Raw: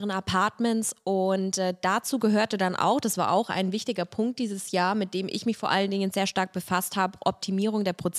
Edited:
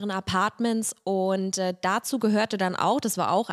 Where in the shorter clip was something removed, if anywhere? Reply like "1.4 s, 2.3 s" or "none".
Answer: none